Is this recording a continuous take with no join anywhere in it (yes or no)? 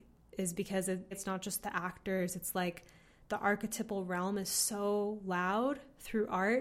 no